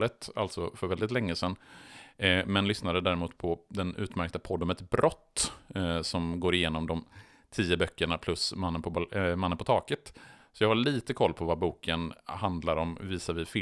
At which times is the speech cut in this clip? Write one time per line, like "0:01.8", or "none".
none